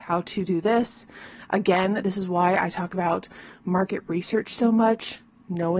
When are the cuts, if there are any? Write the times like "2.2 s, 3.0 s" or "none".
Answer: none

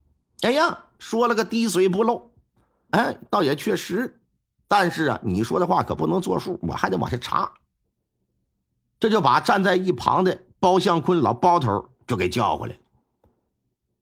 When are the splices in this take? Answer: 2.9 s

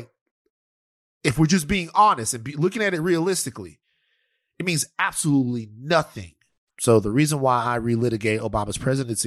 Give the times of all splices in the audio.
6.7 s

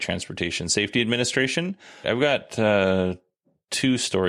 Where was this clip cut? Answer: 2.0 s

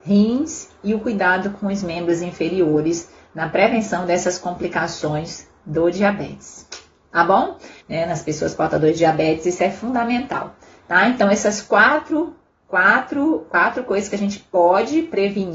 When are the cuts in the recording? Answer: 7.8 s

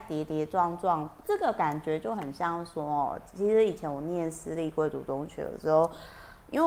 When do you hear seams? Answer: 1.2 s

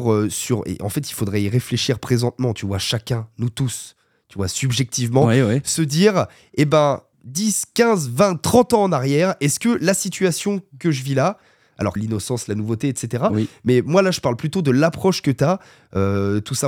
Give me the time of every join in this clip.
7.1 s, 12.0 s

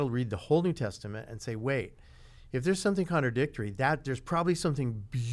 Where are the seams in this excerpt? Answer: none

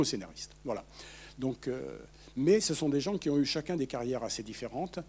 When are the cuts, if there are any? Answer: none

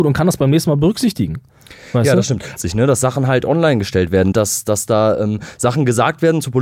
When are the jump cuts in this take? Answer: 2.6 s, 4.3 s

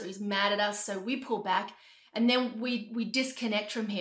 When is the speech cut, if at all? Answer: none

